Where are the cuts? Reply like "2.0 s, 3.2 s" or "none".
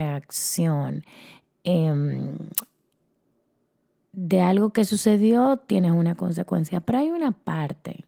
none

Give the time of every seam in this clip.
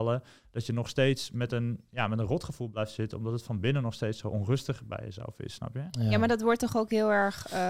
none

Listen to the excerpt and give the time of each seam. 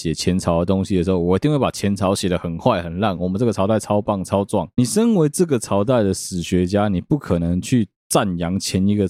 none

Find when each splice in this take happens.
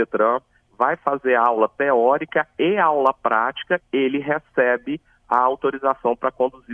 3.8 s

